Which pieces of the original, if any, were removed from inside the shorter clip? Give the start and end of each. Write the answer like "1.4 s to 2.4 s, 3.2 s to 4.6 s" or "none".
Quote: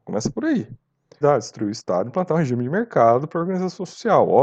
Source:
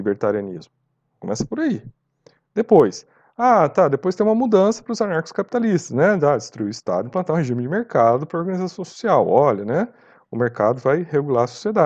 2.4 s to 6.2 s